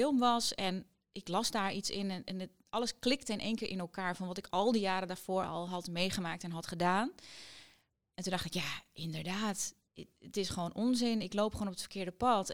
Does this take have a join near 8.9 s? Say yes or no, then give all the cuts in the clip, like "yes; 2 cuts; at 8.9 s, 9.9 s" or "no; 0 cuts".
no; 0 cuts